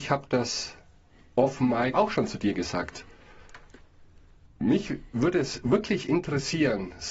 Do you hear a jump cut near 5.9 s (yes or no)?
no